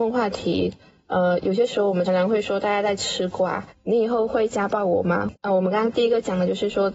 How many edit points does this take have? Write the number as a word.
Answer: three